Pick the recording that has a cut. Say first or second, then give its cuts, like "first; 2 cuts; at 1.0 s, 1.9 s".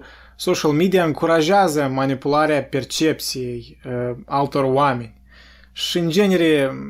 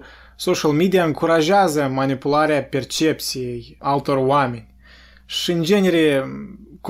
second; 1 cut; at 3.8 s